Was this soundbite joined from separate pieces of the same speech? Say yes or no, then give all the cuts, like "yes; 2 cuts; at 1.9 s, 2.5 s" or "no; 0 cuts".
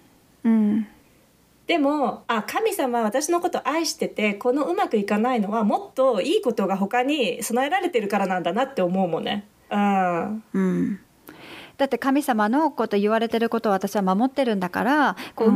yes; 1 cut; at 9.7 s